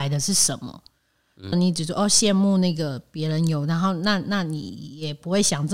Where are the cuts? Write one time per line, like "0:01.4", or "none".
0:01.5